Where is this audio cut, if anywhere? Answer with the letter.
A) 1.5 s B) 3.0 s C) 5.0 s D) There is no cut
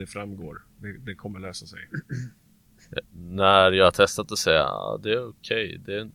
B